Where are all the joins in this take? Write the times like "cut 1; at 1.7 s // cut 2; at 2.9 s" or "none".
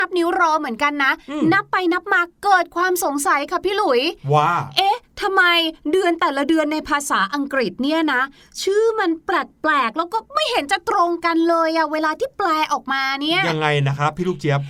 none

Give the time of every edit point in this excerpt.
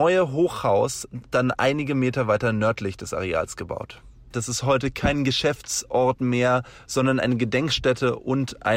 cut 1; at 4.3 s

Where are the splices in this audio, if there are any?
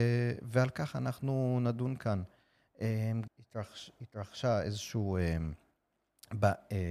cut 1; at 3.3 s

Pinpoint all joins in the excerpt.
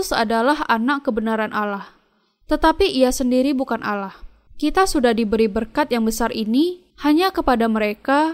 cut 1; at 4.5 s // cut 2; at 6.9 s

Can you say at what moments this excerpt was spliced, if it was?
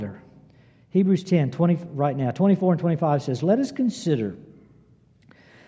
none

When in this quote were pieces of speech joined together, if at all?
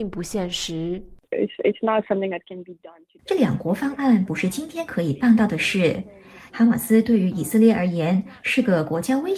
cut 1; at 6.5 s

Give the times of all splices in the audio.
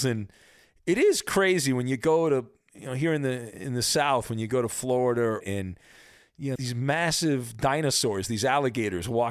cut 1; at 5.4 s // cut 2; at 6.5 s

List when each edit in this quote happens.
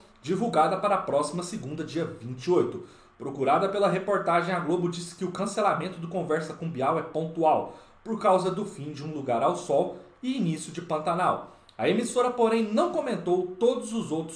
none

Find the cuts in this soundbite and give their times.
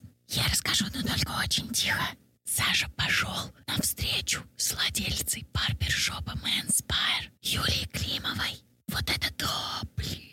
none

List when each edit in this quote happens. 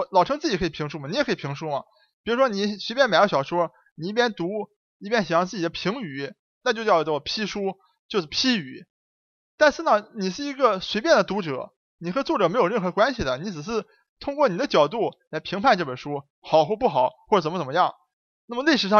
cut 1; at 6.6 s

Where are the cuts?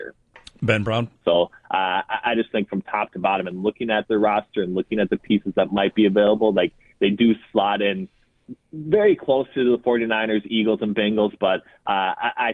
cut 1; at 1.2 s

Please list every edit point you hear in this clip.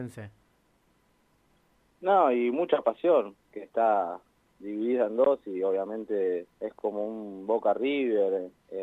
cut 1; at 3.3 s // cut 2; at 6.5 s

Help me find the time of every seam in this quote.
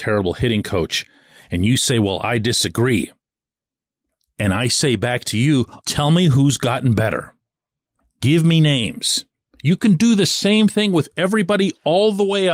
cut 1; at 5.8 s

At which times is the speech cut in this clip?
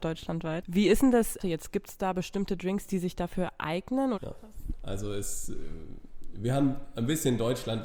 cut 1; at 1.4 s // cut 2; at 4.1 s

